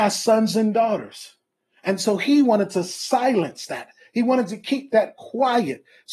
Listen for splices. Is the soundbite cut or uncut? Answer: uncut